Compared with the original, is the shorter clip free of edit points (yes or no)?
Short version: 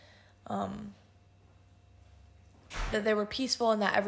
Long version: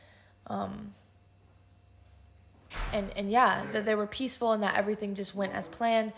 no